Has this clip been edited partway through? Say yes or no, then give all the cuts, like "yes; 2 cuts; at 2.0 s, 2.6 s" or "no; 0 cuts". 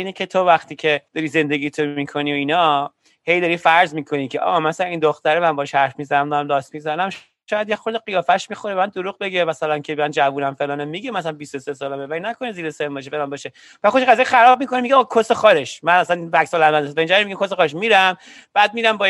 yes; 1 cut; at 1.1 s